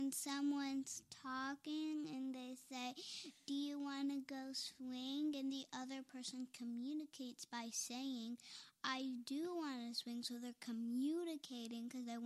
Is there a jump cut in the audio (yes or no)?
no